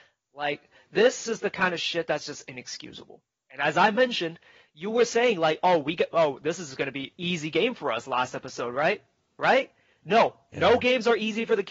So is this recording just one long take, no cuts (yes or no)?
yes